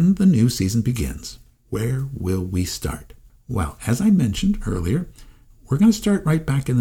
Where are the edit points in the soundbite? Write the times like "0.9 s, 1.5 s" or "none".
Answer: none